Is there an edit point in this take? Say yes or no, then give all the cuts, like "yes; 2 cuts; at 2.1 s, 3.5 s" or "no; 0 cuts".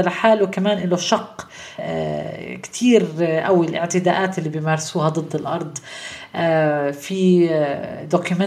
yes; 1 cut; at 1.8 s